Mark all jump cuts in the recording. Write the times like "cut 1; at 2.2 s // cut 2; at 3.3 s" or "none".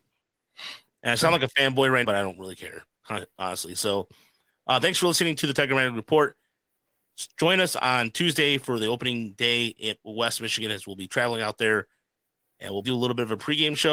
cut 1; at 2.0 s // cut 2; at 12.8 s